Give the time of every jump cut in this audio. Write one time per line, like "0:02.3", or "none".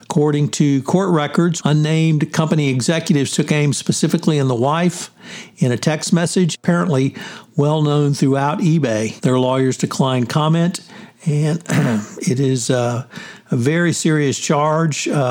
0:01.6
0:06.5
0:09.2